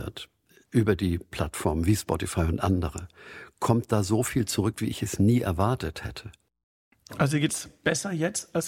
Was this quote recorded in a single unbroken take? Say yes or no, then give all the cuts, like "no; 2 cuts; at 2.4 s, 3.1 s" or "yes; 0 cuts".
yes; 0 cuts